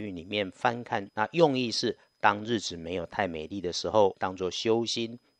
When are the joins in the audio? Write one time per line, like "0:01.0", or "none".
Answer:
0:01.1
0:04.1